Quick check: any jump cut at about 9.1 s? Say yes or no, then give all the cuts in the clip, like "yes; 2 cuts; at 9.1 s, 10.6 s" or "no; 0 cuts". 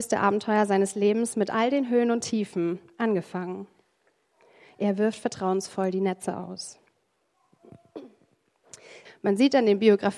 yes; 1 cut; at 9.1 s